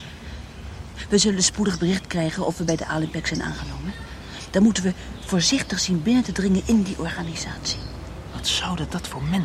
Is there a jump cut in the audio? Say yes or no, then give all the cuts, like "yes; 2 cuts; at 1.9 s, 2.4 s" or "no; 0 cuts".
no; 0 cuts